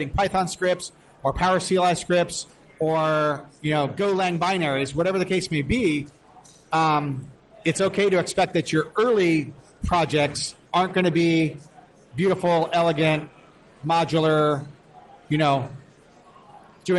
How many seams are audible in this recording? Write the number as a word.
one